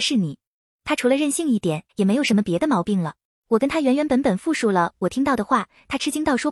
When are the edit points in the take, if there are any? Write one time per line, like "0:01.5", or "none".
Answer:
0:01.9
0:03.2